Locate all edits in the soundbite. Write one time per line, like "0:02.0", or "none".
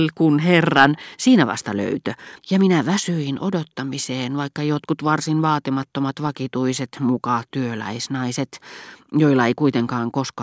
0:02.4